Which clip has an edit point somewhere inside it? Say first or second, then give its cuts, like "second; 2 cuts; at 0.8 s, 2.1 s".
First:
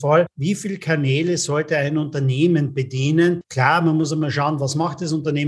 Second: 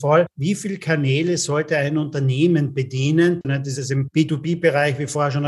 second; 1 cut; at 3.4 s